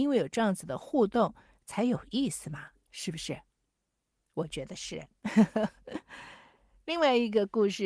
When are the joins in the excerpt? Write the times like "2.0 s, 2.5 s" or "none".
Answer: none